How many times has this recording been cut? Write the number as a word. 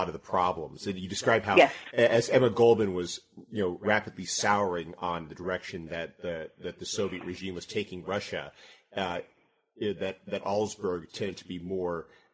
zero